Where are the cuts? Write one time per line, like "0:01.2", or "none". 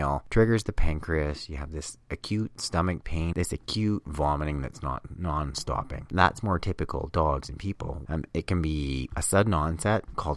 0:03.3
0:08.0